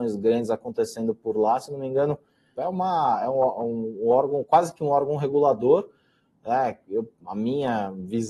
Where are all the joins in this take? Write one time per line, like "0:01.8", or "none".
0:02.5